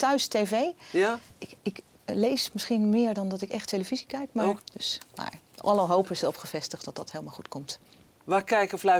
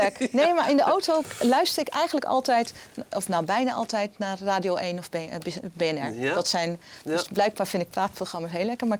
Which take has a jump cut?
first; 1 cut; at 4.6 s

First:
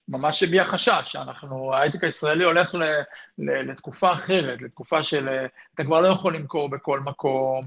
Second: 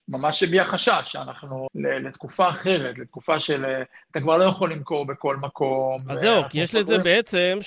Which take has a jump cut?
second; 1 cut; at 1.7 s

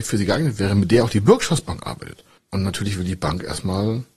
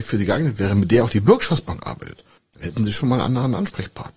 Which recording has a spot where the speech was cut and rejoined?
first; 1 cut; at 2.5 s

